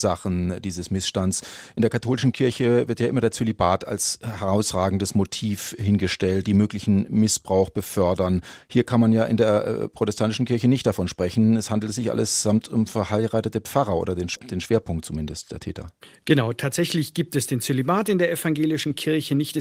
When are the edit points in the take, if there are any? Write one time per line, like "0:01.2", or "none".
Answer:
0:06.4